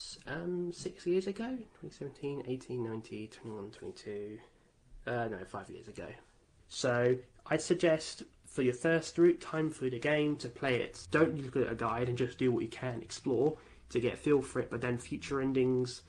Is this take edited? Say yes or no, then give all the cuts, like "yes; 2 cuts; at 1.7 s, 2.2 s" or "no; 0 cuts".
yes; 2 cuts; at 6.6 s, 11.0 s